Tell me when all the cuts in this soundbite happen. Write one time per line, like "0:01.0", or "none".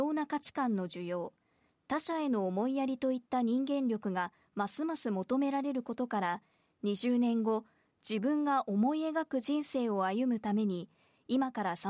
none